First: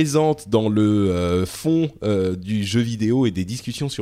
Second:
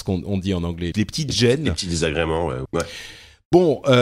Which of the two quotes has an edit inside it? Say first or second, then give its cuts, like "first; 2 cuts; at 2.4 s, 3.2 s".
second; 2 cuts; at 0.9 s, 2.7 s